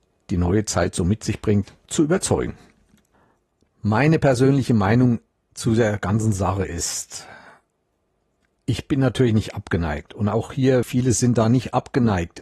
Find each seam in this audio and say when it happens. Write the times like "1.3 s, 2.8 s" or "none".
10.8 s